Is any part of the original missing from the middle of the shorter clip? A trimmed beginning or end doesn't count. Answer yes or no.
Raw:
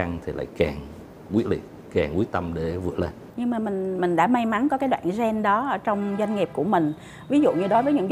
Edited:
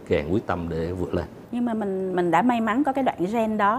no